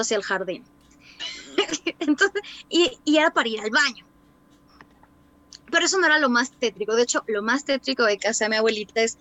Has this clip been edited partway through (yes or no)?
yes